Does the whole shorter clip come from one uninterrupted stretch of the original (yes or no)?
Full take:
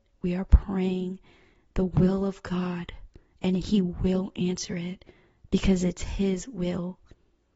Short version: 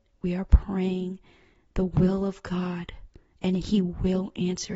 yes